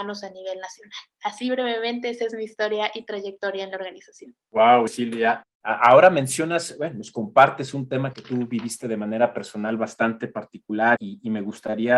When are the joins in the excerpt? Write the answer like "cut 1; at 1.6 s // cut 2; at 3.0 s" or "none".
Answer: cut 1; at 4.9 s // cut 2; at 11.0 s